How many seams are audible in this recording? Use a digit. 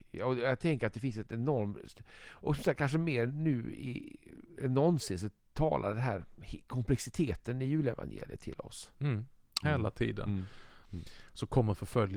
2